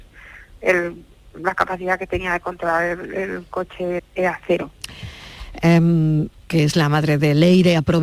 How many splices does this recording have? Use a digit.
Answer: 2